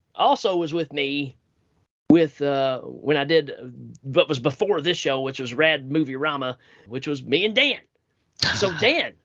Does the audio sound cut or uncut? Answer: cut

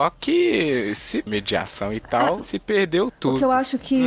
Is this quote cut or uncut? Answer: cut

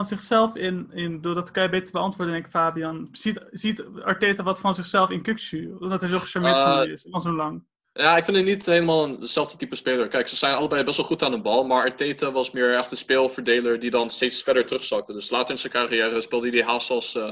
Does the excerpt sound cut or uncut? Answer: uncut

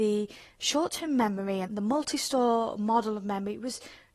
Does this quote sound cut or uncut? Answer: cut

